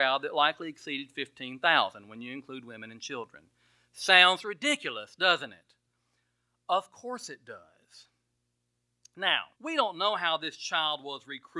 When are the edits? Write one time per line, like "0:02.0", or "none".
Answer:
0:09.5